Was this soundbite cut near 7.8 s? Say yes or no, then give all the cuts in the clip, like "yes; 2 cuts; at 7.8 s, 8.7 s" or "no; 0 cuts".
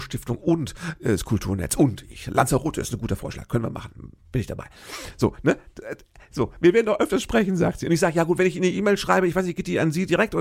no; 0 cuts